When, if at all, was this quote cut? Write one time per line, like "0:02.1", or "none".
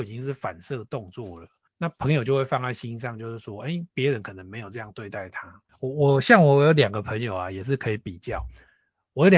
none